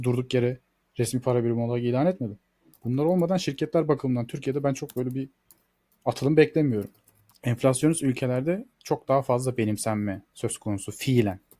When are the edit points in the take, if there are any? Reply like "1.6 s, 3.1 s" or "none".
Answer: 2.7 s, 7.3 s